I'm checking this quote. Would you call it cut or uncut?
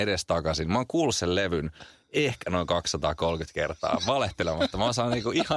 uncut